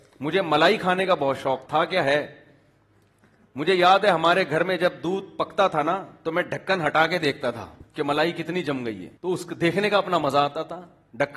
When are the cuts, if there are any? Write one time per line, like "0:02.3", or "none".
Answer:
0:01.7
0:07.9
0:09.2

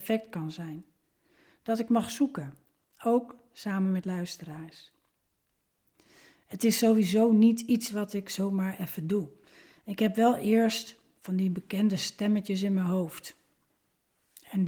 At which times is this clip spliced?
none

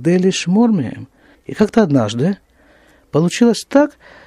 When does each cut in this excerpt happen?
0:01.3

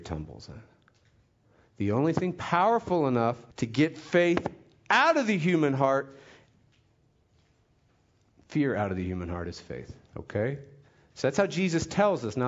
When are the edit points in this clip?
0:03.5
0:10.1

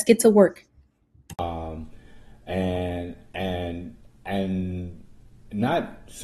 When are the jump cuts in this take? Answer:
none

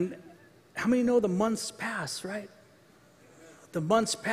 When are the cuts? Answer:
none

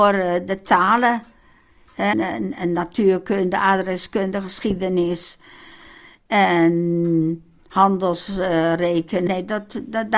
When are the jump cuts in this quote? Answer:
0:02.1
0:09.3

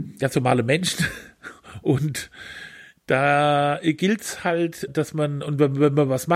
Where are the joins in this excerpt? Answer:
0:04.9

